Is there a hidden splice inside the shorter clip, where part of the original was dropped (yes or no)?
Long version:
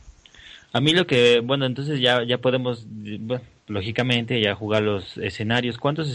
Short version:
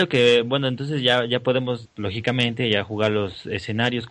yes